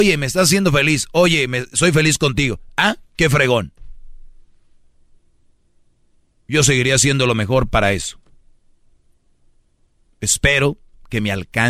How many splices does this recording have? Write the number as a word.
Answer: zero